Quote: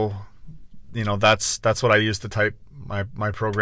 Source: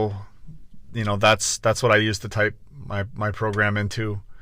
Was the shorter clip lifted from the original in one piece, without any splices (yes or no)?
yes